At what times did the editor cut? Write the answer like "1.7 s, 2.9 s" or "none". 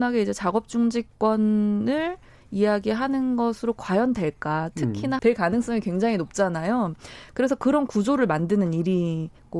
5.2 s